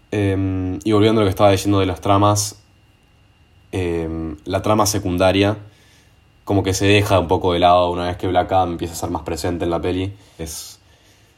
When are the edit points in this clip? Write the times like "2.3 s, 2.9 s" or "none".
10.4 s